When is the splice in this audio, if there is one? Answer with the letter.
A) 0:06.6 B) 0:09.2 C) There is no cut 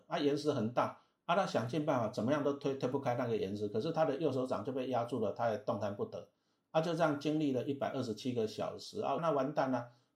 B